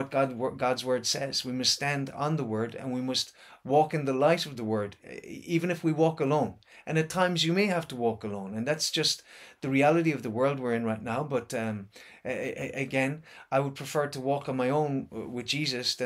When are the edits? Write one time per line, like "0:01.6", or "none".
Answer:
none

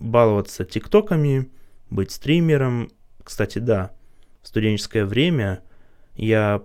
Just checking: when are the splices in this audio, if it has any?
none

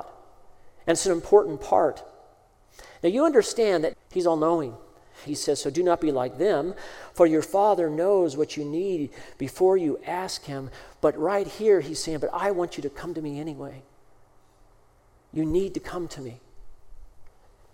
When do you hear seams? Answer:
0:03.9
0:05.3

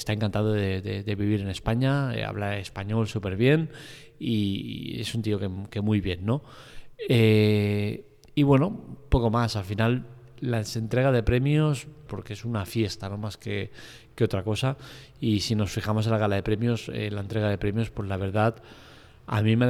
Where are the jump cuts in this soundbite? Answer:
0:12.1

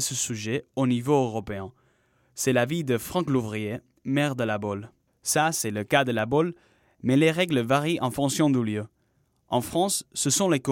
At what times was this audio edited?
0:05.1

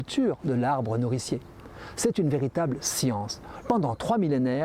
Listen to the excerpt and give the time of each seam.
0:03.6

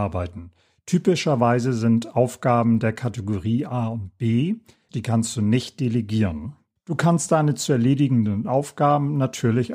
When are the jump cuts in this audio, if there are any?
0:04.9
0:06.8

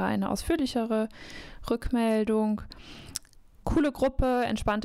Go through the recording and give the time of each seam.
0:03.6

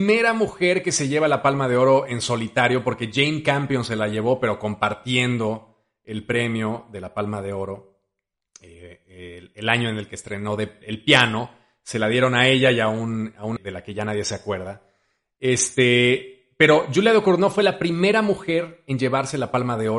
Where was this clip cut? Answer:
0:10.8
0:13.6

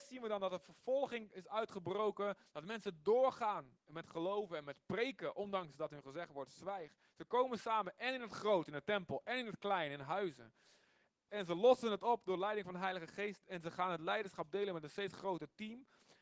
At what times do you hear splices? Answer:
0:11.3

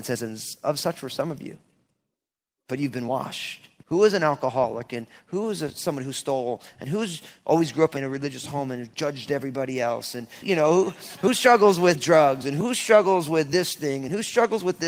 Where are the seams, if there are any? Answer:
0:03.8
0:10.4

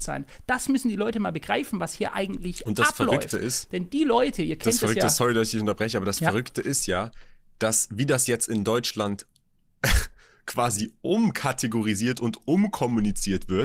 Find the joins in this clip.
none

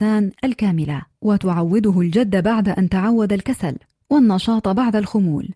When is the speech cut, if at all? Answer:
0:01.1

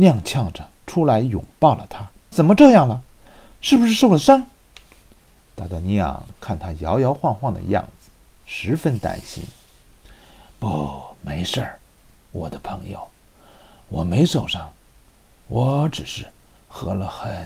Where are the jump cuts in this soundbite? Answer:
0:02.3

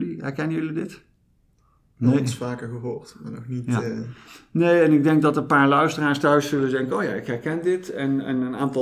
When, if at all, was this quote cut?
none

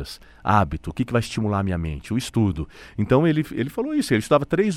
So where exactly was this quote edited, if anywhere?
none

